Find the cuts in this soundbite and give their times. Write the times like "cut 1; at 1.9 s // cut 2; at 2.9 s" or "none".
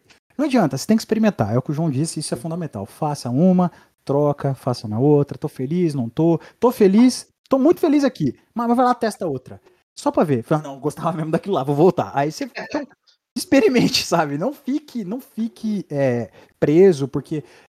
none